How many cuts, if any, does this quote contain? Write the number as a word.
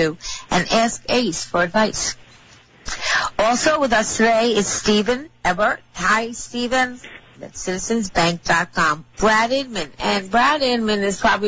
two